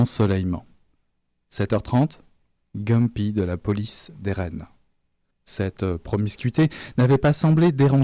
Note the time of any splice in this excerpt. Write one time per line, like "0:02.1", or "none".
0:02.6
0:05.3